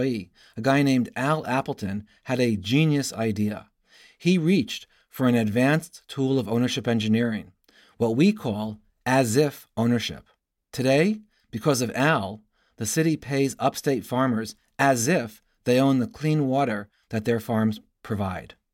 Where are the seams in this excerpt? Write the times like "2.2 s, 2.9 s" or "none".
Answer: none